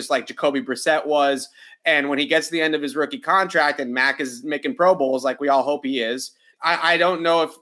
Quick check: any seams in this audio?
yes; 1 cut; at 6.5 s

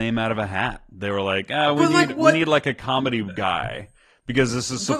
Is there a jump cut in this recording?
no; 0 cuts

